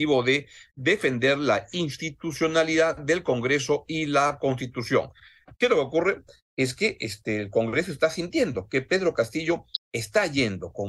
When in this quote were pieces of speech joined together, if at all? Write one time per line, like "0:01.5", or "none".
none

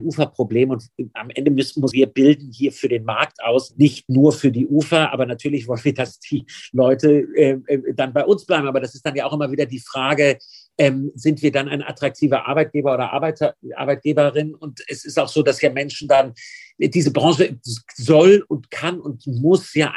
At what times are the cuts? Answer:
0:01.9

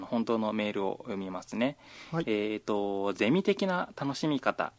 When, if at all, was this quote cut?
none

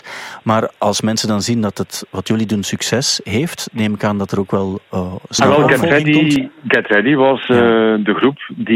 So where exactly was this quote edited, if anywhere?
none

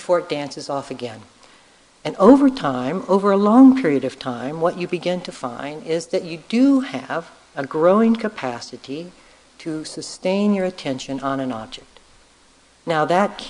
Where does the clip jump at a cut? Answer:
none

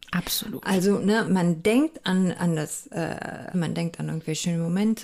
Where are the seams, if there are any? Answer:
0:01.3
0:03.5

